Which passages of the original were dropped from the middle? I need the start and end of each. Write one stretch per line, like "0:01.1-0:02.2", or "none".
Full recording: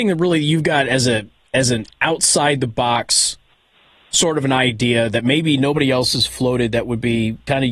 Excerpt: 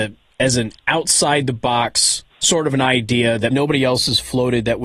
0:03.4-0:04.0
0:05.2-0:05.6

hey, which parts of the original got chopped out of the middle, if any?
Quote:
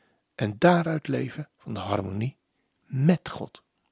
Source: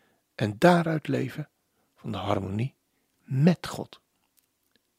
0:01.5-0:01.9

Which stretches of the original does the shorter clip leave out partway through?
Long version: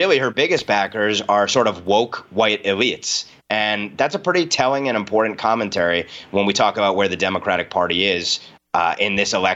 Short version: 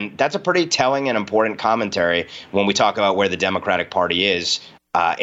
none

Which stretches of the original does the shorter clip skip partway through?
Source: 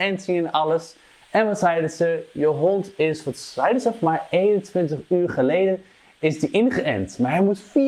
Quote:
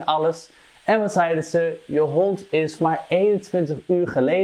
0:03.2-0:04.0

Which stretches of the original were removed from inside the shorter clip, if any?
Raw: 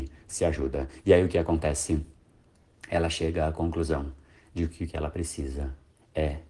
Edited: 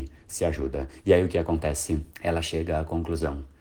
0:02.1-0:02.8

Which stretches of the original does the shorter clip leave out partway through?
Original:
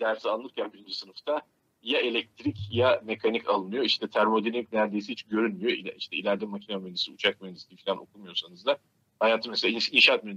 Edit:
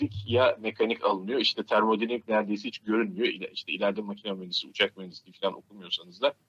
none

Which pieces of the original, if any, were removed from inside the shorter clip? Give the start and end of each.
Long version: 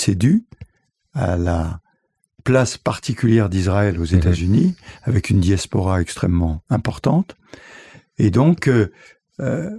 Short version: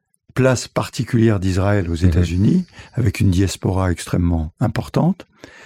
none

